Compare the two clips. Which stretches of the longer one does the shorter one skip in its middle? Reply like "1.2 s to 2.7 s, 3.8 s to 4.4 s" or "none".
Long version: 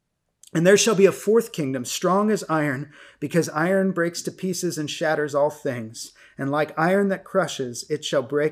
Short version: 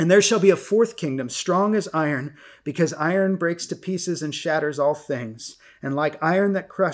none